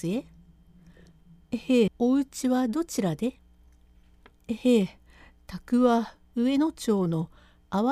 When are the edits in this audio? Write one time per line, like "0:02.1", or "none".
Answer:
0:01.9